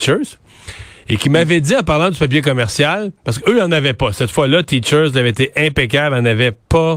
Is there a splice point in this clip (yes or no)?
no